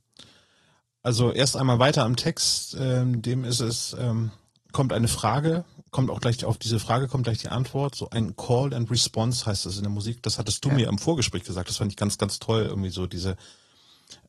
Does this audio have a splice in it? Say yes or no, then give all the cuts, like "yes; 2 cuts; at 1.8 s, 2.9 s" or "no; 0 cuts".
no; 0 cuts